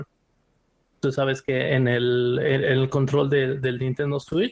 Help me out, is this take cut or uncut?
cut